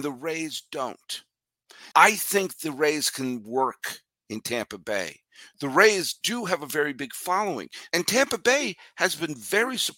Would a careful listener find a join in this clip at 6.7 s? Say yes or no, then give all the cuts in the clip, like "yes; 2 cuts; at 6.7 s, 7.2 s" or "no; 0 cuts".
no; 2 cuts; at 1.9 s, 7.9 s